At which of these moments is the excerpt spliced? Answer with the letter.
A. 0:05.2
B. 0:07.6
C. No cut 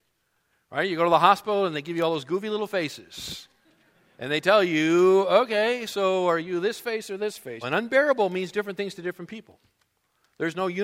B